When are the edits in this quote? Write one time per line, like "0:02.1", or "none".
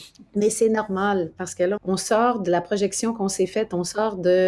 0:01.8

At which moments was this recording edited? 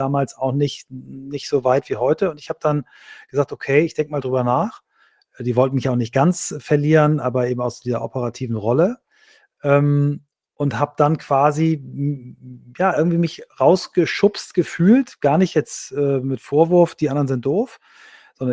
none

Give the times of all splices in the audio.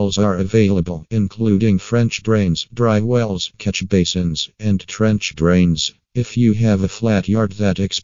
0:06.1

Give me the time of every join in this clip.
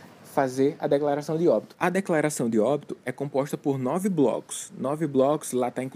0:01.7

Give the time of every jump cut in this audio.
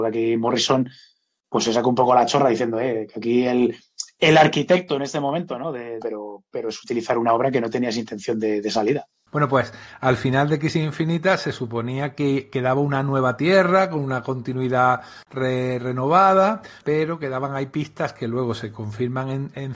0:06.0
0:09.3
0:16.8

